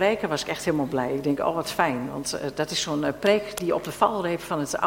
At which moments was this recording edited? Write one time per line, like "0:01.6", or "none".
none